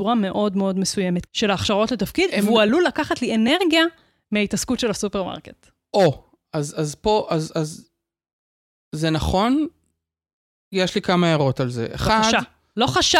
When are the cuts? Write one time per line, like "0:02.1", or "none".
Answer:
0:01.3